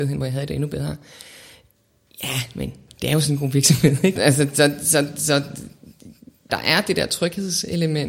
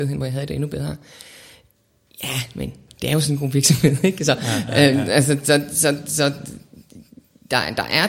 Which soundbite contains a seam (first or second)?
first